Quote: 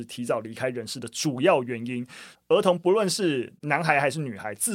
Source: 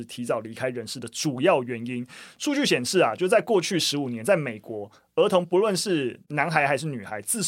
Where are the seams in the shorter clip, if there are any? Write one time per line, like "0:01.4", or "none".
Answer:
0:02.4